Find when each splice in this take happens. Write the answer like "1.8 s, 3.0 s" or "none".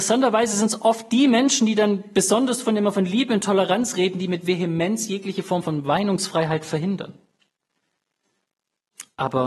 none